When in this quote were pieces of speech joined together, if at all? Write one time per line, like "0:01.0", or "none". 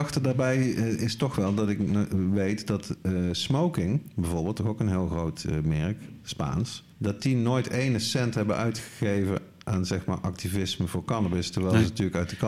0:06.9